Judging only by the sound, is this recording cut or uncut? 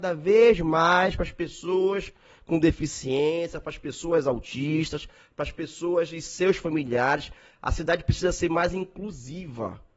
uncut